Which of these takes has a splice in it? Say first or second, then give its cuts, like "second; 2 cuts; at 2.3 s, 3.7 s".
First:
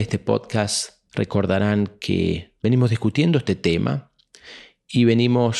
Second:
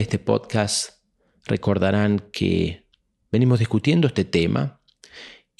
first; 2 cuts; at 1.1 s, 2.6 s